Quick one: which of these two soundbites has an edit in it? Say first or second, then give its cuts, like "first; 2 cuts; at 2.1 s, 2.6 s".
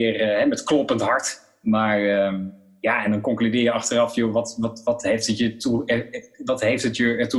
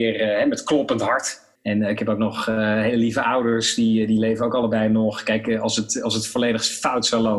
second; 1 cut; at 1.6 s